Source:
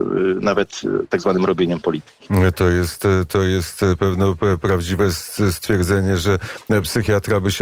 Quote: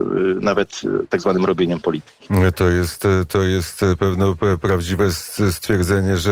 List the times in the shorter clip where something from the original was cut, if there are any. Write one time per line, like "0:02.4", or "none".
none